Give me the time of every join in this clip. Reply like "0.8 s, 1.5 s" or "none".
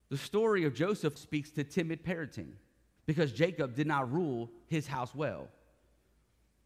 1.2 s, 3.0 s